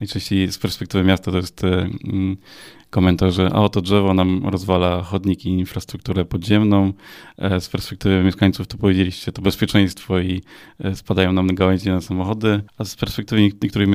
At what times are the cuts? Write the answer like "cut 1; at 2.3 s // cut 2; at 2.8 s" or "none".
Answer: cut 1; at 12.7 s